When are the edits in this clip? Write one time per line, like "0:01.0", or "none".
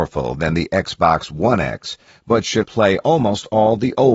0:02.6